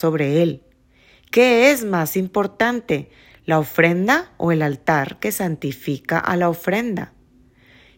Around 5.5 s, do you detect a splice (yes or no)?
no